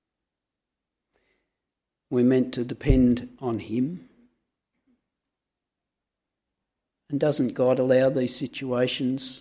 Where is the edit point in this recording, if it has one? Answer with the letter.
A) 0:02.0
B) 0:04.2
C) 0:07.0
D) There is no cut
D